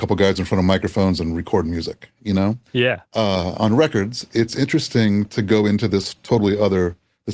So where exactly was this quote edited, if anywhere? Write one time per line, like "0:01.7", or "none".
0:02.7